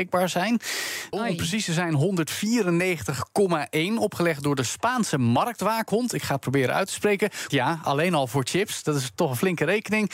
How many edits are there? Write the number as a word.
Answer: two